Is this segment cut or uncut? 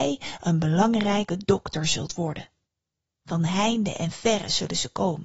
uncut